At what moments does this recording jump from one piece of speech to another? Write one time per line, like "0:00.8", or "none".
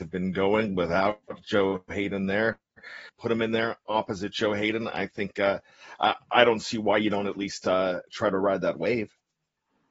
0:03.1

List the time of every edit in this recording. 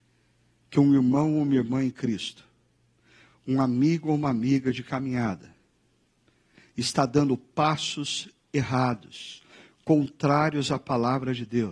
none

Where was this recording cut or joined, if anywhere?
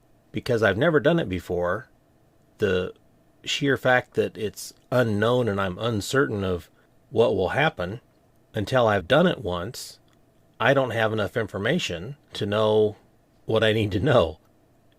0:09.0
0:12.2

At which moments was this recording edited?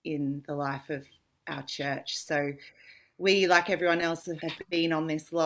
0:04.4

